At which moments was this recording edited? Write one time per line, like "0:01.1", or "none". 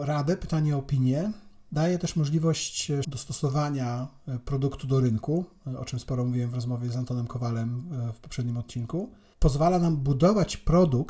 0:03.0